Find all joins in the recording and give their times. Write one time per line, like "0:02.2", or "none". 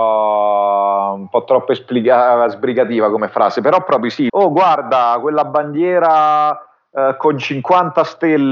0:04.3